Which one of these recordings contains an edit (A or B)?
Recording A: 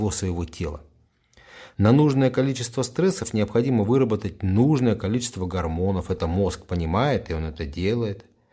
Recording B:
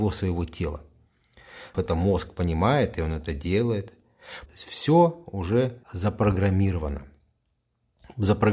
B